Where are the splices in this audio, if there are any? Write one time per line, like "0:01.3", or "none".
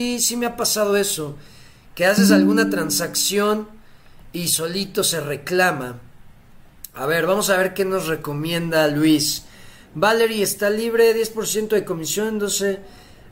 none